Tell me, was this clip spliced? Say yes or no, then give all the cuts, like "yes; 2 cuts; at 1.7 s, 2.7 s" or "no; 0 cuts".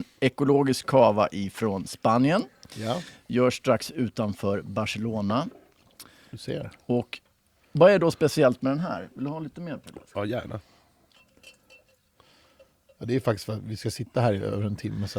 no; 0 cuts